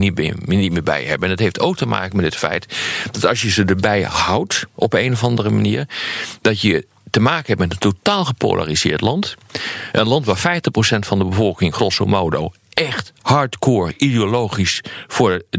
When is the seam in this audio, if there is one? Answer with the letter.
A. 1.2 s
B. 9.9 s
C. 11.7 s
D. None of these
D